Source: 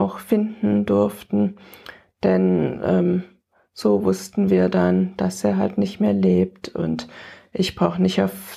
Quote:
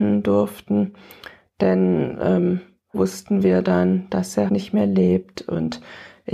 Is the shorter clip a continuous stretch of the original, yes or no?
no